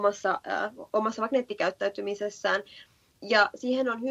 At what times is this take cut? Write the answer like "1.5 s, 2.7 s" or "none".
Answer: none